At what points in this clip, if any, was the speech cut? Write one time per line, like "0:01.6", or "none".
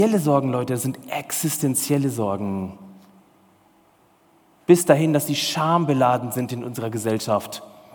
none